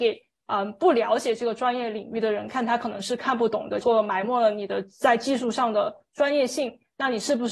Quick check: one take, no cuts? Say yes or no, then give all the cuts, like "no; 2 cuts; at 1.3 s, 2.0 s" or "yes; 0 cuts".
no; 1 cut; at 3.8 s